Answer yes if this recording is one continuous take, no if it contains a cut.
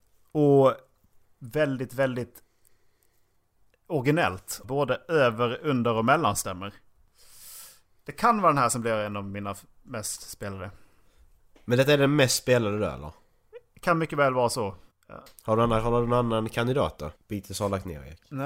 no